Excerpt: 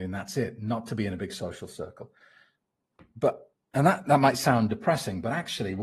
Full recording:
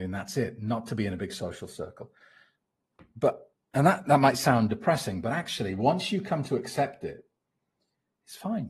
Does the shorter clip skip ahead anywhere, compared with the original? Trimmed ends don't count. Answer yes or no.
no